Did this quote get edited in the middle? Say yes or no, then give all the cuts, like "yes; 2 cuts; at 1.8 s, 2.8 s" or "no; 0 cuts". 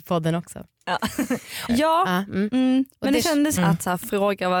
yes; 2 cuts; at 1.7 s, 3.6 s